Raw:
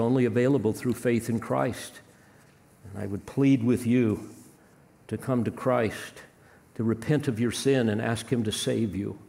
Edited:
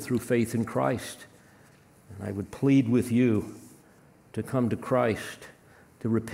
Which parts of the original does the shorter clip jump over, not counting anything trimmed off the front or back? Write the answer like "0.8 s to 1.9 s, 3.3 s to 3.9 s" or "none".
none